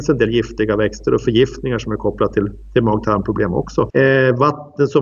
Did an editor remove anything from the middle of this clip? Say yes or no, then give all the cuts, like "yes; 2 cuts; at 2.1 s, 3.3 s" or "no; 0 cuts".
yes; 1 cut; at 3.9 s